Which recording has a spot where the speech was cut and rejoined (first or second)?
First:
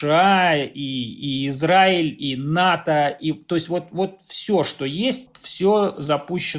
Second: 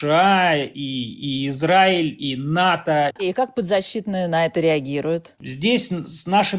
second